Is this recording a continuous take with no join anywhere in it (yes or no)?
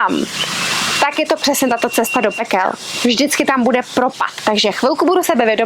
yes